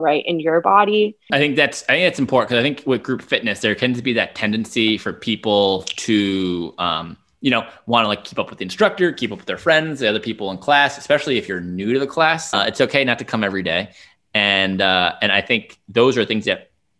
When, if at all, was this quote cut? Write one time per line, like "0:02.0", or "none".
0:01.3
0:12.5

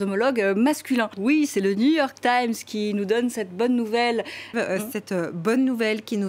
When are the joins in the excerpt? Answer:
0:01.1
0:04.5

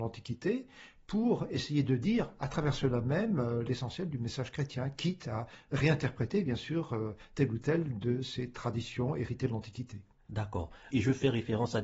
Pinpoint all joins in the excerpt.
0:10.9

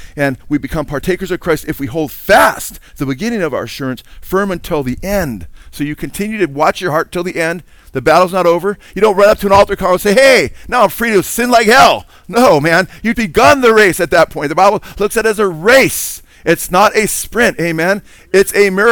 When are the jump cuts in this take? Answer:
0:13.1

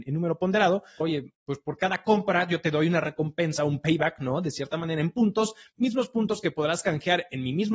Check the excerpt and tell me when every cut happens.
0:01.0

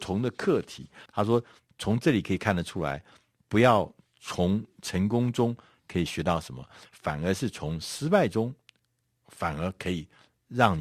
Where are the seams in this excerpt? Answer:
0:01.1

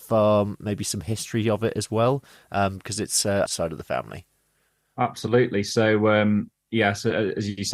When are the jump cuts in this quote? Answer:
0:03.5

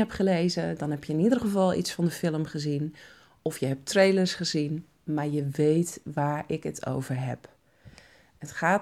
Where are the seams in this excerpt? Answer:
none

